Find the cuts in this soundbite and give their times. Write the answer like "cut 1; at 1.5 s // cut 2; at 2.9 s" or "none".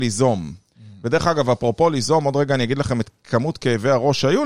none